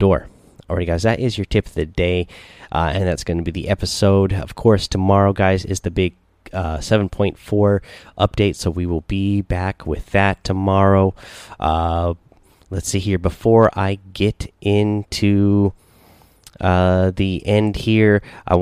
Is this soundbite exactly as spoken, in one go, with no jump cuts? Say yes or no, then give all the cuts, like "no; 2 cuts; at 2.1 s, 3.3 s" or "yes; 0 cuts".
yes; 0 cuts